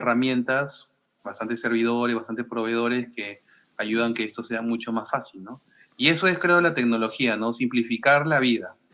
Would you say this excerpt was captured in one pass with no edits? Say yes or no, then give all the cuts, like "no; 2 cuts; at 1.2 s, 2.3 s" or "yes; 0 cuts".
yes; 0 cuts